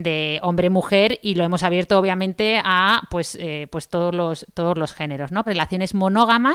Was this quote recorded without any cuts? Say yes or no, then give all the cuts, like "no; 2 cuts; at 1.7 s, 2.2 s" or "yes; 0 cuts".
no; 1 cut; at 5.5 s